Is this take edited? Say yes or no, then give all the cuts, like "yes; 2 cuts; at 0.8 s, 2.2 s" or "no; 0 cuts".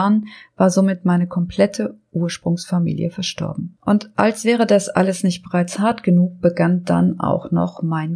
no; 0 cuts